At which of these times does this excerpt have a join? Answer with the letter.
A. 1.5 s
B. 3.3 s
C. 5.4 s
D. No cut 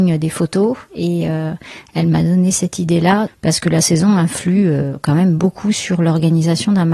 B